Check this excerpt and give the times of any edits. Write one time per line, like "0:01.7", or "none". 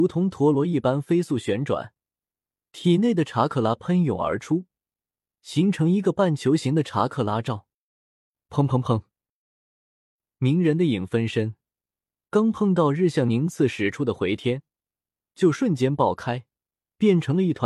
none